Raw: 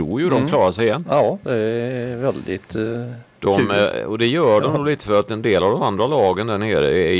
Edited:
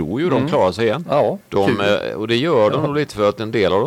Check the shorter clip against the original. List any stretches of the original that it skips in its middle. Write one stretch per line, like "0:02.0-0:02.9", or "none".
0:01.4-0:03.3